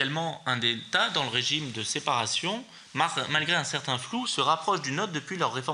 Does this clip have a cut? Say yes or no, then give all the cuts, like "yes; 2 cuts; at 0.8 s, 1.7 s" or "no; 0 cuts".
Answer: no; 0 cuts